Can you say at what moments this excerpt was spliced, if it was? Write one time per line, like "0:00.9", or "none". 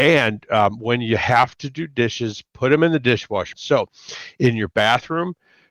0:03.5